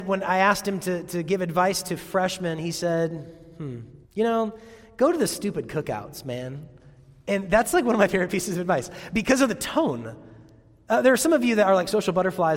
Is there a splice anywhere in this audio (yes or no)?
yes